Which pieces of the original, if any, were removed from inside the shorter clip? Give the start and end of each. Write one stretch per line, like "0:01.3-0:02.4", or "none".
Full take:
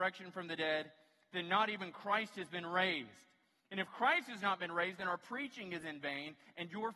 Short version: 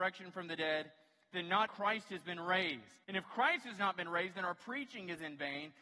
0:01.7-0:01.9
0:03.3-0:03.7